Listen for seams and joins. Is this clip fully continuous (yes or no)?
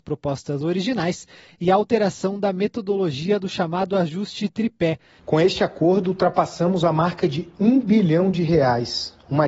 no